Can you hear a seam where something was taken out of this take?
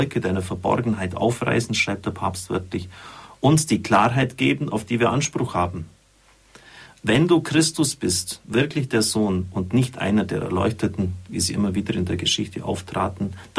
no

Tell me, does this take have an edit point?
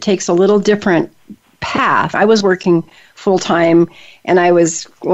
yes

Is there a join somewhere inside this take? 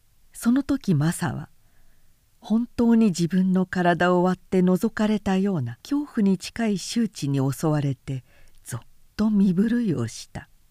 yes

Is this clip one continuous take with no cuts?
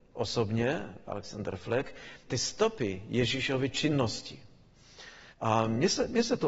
no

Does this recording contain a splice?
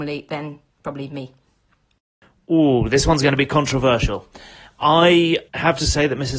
yes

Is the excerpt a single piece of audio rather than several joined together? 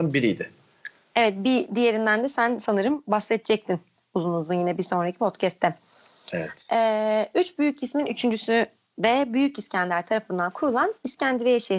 yes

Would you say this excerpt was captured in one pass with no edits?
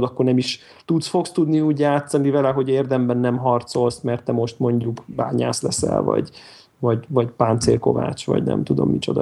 yes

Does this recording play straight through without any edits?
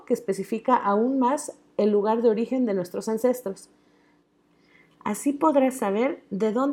yes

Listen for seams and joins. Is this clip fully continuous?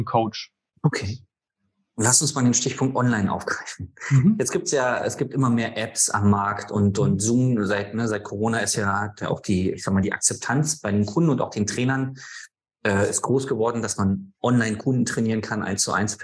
yes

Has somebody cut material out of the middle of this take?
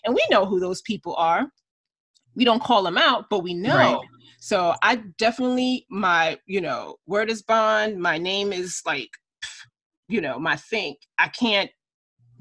no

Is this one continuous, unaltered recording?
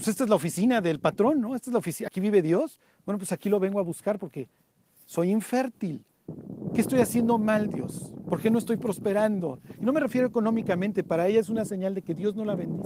yes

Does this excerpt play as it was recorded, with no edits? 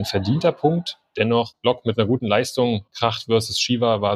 yes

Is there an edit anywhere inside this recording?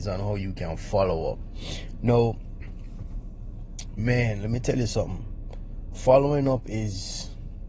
no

